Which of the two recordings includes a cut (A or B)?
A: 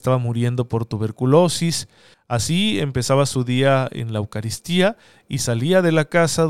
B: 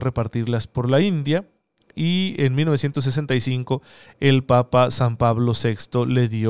A